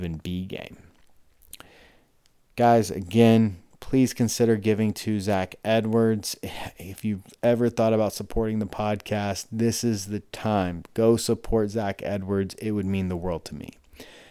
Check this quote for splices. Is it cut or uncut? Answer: uncut